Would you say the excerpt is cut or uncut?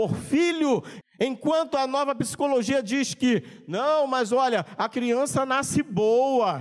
cut